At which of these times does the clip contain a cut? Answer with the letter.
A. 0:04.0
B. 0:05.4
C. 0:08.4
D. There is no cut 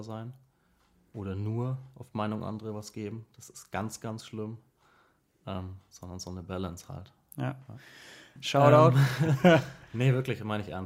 C